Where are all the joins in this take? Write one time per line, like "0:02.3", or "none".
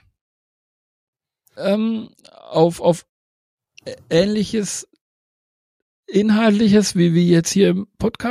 0:01.6